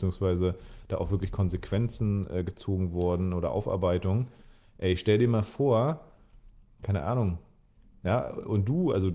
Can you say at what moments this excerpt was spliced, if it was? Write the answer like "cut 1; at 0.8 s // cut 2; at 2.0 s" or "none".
none